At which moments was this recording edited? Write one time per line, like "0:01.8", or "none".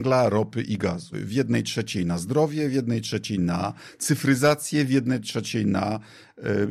0:01.1